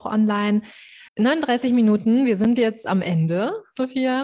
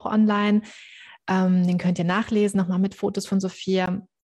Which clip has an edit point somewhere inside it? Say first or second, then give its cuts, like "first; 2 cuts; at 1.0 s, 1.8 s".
first; 1 cut; at 1.1 s